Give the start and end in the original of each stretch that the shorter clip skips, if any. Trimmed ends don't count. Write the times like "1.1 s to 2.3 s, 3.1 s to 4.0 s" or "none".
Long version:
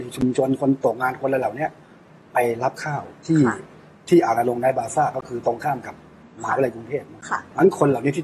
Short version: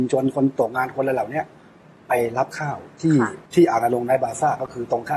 3.7 s to 4.0 s